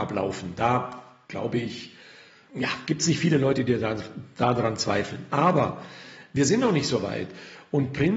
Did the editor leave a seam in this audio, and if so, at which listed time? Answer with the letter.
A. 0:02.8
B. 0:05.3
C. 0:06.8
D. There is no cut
D